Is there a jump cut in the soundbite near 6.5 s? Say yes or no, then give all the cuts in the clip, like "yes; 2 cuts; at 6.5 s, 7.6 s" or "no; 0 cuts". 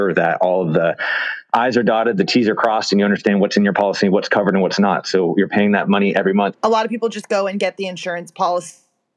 yes; 1 cut; at 6.5 s